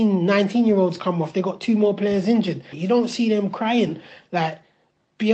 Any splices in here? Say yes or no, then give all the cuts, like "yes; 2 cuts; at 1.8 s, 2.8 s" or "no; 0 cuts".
yes; 1 cut; at 2.7 s